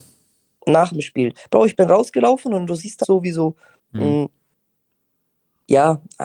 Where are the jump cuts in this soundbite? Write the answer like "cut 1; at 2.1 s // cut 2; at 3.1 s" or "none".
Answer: cut 1; at 3.0 s